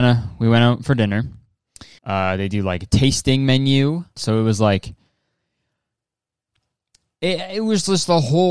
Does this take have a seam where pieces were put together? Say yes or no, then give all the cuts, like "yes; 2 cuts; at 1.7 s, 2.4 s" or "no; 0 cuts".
yes; 2 cuts; at 2.0 s, 4.2 s